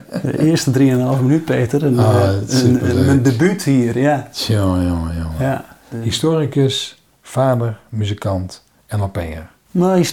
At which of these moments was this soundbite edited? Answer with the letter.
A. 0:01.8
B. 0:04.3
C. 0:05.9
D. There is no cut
C